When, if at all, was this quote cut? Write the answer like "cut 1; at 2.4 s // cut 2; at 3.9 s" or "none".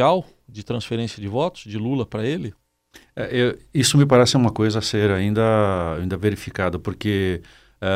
none